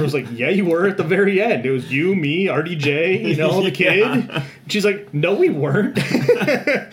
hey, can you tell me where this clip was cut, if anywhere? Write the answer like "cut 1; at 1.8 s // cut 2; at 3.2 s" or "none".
none